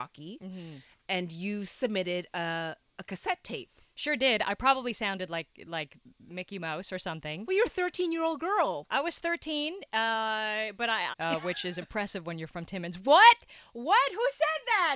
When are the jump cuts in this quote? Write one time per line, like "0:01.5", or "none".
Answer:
0:11.1